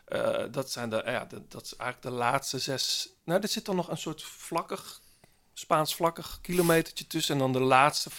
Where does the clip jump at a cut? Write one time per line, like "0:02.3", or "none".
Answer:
none